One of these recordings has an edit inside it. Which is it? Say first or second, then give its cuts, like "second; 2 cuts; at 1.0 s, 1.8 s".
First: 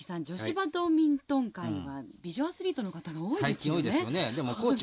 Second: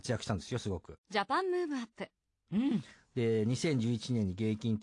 second; 2 cuts; at 1.0 s, 2.5 s